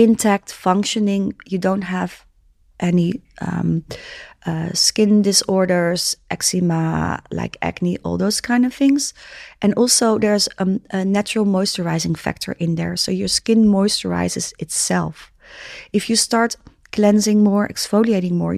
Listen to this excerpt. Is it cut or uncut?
uncut